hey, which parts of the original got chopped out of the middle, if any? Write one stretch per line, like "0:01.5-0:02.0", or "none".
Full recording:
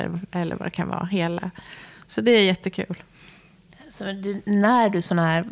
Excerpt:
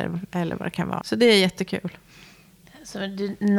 0:01.0-0:02.1

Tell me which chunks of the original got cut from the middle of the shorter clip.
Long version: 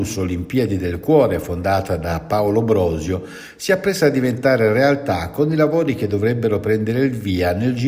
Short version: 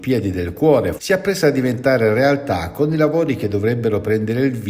0:01.4-0:03.5

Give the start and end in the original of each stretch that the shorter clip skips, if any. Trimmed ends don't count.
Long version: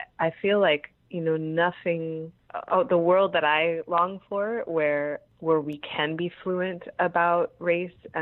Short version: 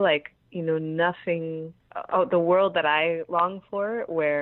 none

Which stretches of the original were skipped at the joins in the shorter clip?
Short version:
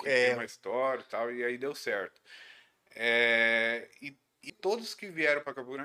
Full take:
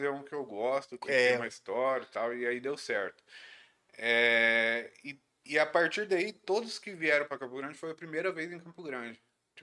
0:05.5-0:06.3

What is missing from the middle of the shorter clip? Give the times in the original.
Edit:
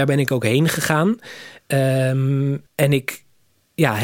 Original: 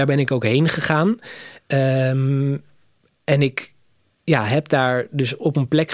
0:02.7-0:03.2

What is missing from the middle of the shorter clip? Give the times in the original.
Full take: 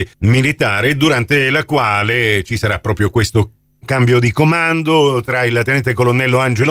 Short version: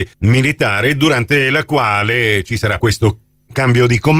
0:02.8-0:03.1

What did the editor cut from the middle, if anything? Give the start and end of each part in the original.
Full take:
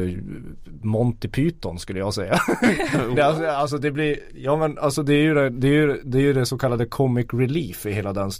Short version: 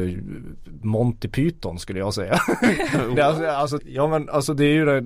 0:03.8-0:04.3

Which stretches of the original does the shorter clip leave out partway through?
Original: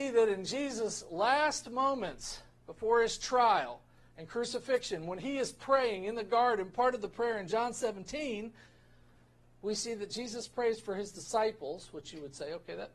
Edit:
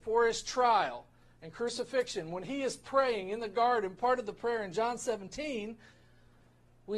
none

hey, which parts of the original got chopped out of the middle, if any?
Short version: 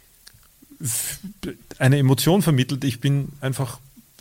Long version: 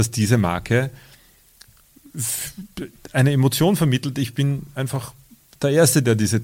none

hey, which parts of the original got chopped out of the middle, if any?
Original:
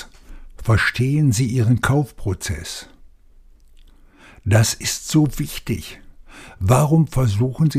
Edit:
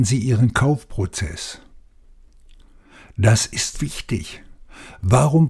0:05.0-0:05.3

